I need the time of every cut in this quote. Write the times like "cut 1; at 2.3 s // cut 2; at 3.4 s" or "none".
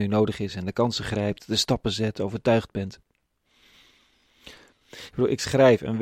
cut 1; at 4.7 s